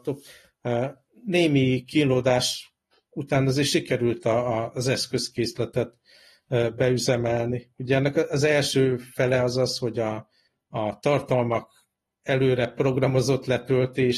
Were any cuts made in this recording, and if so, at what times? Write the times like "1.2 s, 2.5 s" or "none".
none